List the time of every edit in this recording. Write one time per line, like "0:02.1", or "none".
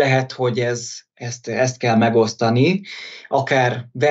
none